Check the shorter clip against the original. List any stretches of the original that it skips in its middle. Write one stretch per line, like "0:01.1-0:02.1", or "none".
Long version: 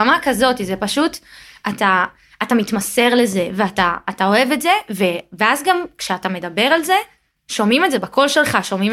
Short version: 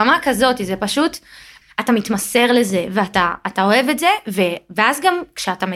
0:01.6-0:02.2